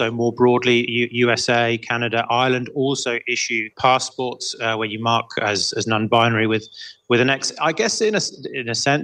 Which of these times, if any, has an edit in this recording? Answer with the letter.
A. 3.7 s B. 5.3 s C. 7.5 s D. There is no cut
A